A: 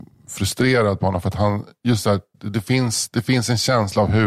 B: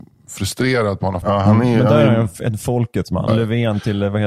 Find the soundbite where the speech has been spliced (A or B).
B